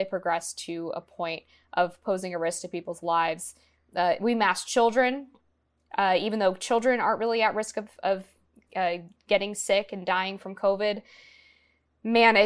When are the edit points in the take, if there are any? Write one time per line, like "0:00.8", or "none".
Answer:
none